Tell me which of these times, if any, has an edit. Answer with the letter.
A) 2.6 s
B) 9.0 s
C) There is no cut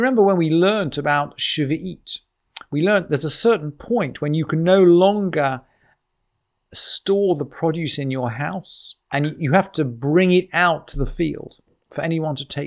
B